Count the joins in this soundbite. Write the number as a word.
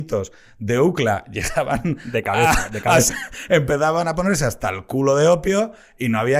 one